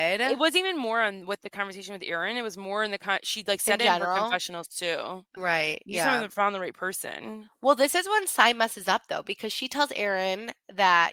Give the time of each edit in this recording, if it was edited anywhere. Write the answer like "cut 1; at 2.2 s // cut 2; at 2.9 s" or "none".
cut 1; at 5.4 s

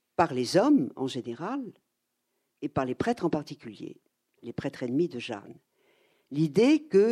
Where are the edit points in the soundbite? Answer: cut 1; at 6.1 s

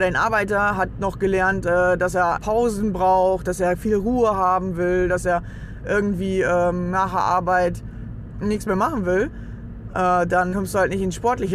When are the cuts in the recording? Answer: cut 1; at 2.4 s // cut 2; at 10.5 s

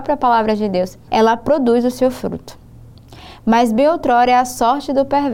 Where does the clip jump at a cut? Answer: cut 1; at 1.1 s

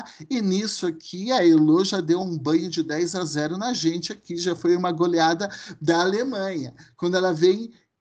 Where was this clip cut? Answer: none

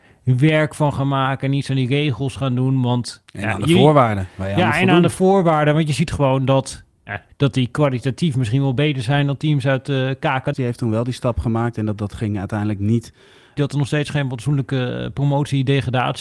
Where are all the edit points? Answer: cut 1; at 7.3 s // cut 2; at 10.5 s // cut 3; at 13.6 s

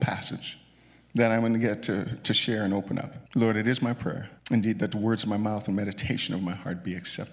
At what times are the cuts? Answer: cut 1; at 3.3 s // cut 2; at 4.4 s

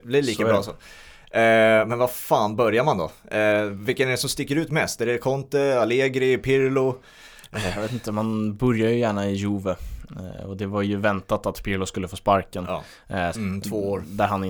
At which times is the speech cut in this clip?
cut 1; at 13.3 s

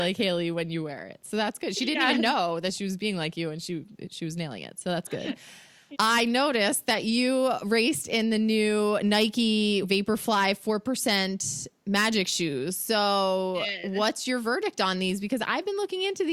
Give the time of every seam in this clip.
cut 1; at 5.9 s // cut 2; at 9.8 s

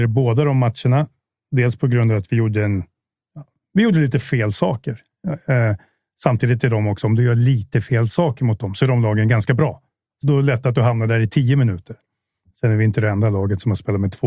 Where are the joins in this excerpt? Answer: cut 1; at 10.2 s // cut 2; at 12.4 s

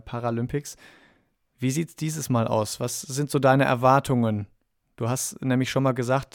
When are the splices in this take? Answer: none

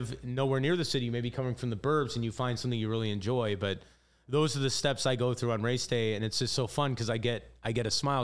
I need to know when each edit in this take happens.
none

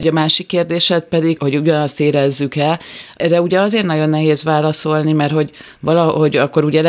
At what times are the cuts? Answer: cut 1; at 1.4 s

